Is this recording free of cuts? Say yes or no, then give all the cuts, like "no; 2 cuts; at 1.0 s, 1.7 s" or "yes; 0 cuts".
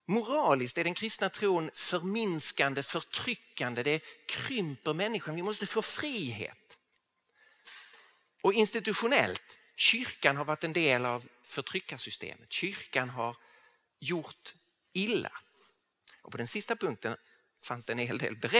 yes; 0 cuts